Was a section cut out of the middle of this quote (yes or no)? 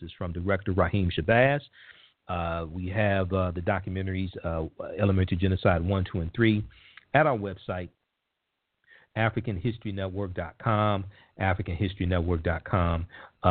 no